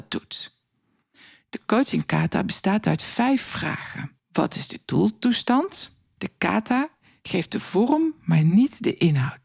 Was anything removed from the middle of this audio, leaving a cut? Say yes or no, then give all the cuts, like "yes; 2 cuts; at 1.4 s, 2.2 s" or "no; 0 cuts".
yes; 2 cuts; at 4.2 s, 6.2 s